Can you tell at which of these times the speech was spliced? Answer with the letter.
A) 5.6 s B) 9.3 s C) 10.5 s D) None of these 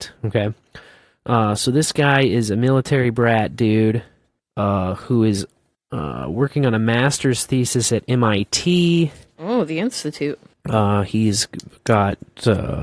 C